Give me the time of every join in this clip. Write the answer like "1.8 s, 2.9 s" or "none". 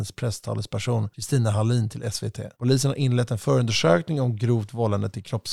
2.5 s